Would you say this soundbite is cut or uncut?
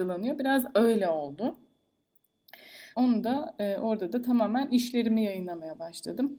cut